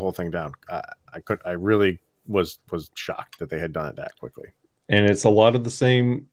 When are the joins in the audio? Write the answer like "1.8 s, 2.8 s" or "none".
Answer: 2.9 s